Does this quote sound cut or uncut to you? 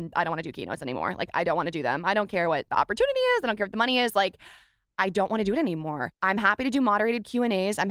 uncut